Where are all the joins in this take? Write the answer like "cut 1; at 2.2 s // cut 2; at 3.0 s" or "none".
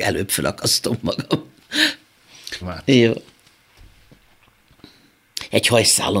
cut 1; at 2.6 s